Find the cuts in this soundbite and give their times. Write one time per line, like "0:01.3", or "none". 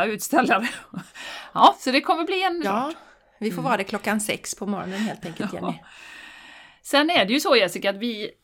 0:02.6